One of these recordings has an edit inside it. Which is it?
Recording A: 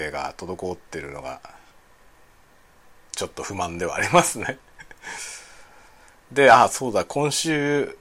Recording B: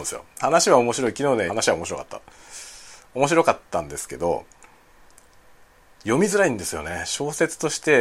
B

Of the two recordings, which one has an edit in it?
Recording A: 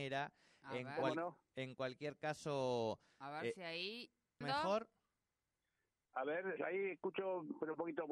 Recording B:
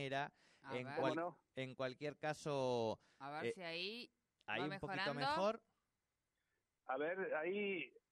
A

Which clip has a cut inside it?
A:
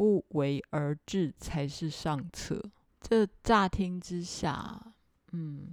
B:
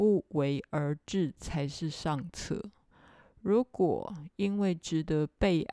A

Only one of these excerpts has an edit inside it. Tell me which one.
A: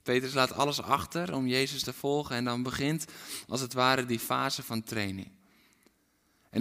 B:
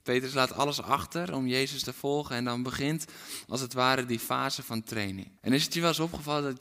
B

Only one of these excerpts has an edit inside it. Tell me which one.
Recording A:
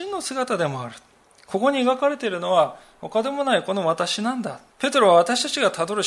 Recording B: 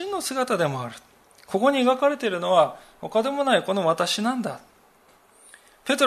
A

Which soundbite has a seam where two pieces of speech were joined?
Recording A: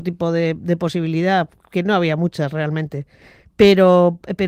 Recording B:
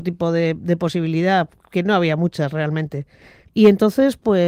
B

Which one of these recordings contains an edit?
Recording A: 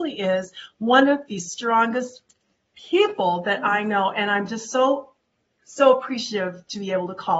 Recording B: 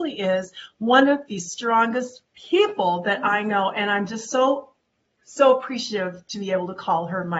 B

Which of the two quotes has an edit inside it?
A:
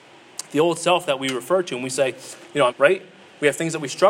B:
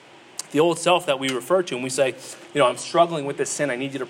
A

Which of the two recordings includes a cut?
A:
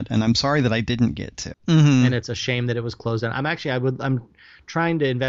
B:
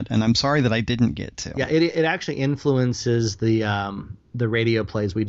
A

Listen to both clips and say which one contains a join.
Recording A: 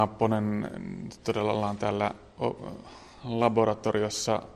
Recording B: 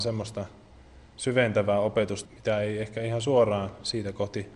B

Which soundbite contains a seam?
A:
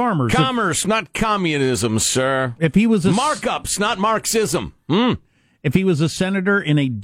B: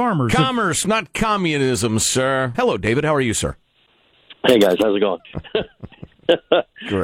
B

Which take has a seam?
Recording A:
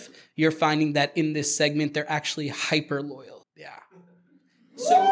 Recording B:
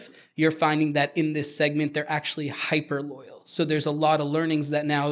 A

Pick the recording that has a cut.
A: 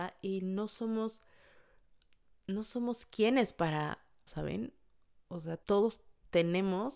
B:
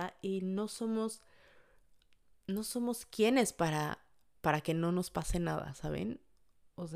A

